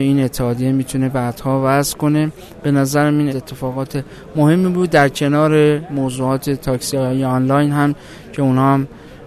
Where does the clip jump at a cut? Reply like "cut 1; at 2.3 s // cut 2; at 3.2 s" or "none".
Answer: cut 1; at 3.3 s

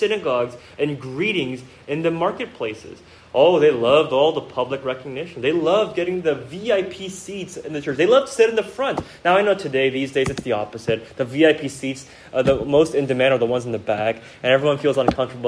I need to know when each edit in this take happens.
none

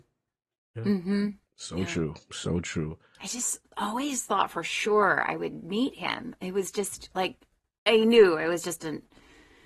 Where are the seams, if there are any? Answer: none

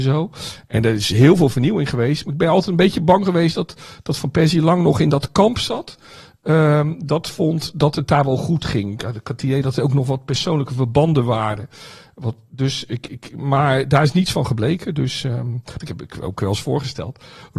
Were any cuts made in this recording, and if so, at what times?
cut 1; at 15.8 s

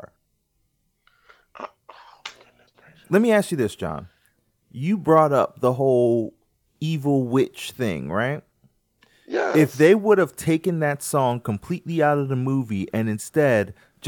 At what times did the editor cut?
none

